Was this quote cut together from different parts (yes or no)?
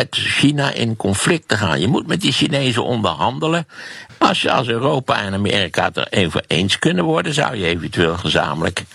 no